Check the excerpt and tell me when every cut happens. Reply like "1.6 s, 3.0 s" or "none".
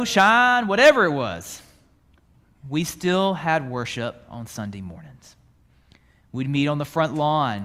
none

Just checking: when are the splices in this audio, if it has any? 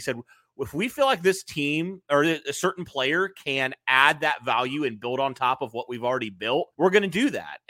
6.7 s

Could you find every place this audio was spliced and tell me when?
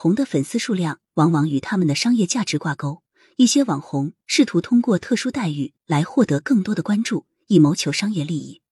none

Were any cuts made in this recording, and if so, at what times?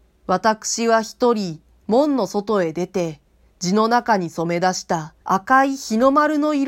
3.4 s, 5.2 s

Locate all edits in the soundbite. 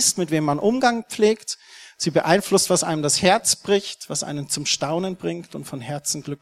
none

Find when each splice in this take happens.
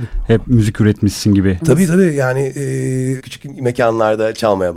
1.6 s, 3.2 s

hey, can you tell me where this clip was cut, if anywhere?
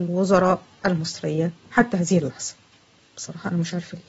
none

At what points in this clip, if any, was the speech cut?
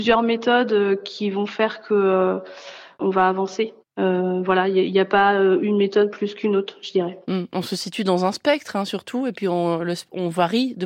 none

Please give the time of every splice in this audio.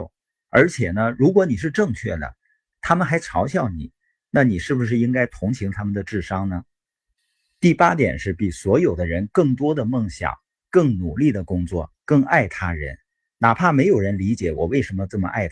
none

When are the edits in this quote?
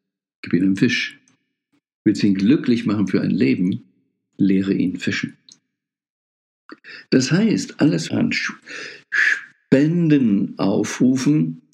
8.1 s

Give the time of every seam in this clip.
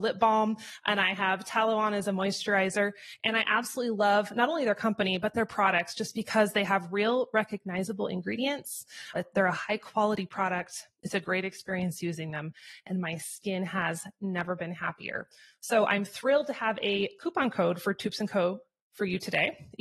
9.1 s

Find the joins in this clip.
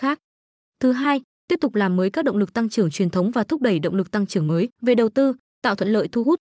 4.7 s

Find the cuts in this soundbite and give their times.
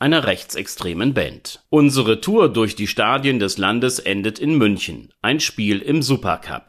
none

